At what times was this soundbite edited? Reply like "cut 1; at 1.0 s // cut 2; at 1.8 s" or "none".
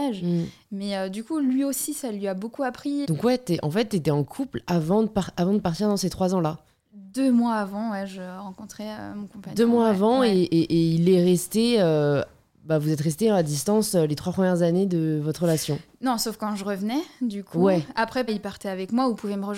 cut 1; at 3.0 s // cut 2; at 18.3 s